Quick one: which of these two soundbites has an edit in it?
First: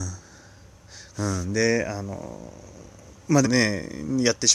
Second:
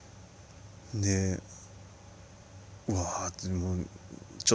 first; 2 cuts; at 1.1 s, 3.4 s

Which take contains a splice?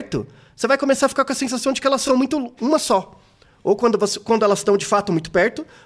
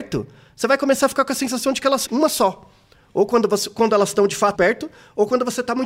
second; 2 cuts; at 2.1 s, 4.5 s

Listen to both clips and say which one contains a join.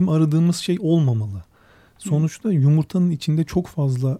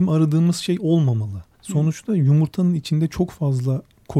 second; 1 cut; at 1.5 s

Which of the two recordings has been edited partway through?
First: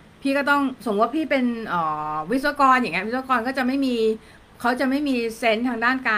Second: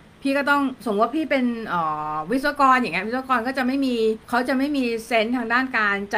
second; 1 cut; at 4.2 s

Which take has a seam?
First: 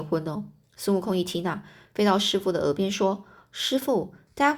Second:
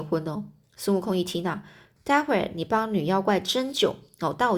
second; 1 cut; at 1.9 s

